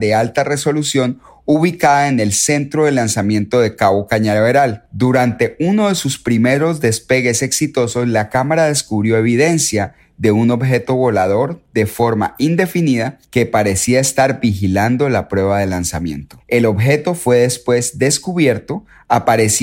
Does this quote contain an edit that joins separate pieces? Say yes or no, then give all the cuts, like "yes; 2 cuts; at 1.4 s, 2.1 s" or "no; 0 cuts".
no; 0 cuts